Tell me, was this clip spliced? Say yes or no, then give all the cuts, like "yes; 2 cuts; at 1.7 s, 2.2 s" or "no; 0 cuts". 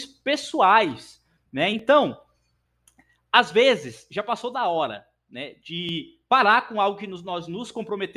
yes; 1 cut; at 1.7 s